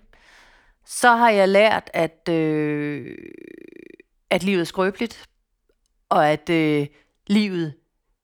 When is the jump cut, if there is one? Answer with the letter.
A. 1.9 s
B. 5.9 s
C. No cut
C